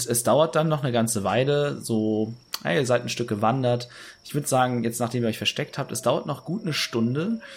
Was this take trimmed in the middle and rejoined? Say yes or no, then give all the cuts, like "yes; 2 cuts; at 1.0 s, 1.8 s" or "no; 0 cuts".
no; 0 cuts